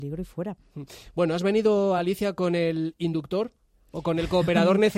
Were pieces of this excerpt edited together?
no; 0 cuts

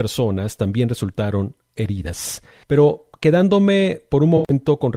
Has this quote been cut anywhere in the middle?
yes; 1 cut; at 2.6 s

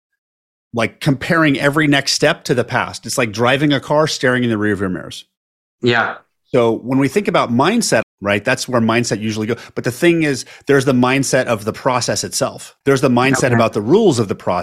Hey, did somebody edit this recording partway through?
yes; 2 cuts; at 8.0 s, 12.8 s

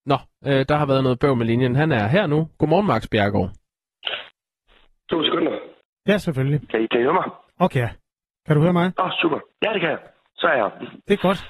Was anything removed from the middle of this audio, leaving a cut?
yes; 1 cut; at 6.8 s

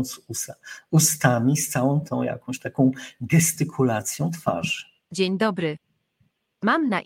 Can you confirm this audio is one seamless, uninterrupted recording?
yes; 0 cuts

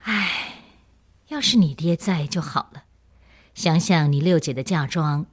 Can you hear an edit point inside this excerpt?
no; 0 cuts

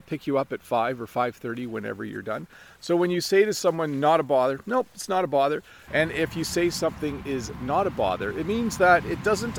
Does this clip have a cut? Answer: yes; 1 cut; at 5.9 s

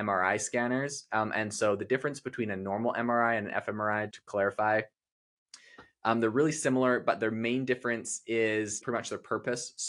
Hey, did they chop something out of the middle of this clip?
yes; 2 cuts; at 4.1 s, 8.8 s

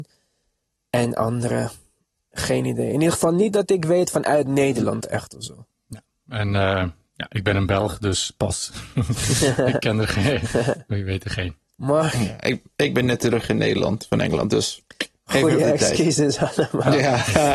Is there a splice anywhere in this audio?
no; 0 cuts

